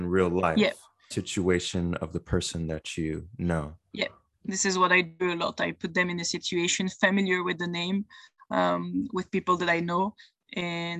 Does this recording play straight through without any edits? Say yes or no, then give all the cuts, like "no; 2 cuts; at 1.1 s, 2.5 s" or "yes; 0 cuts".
no; 1 cut; at 1.1 s